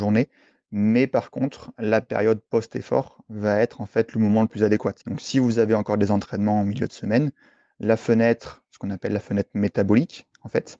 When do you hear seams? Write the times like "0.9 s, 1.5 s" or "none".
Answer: 5.0 s